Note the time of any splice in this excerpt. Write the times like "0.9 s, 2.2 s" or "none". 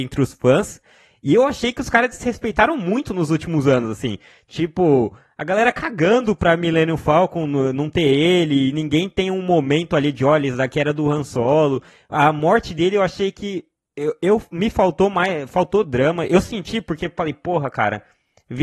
none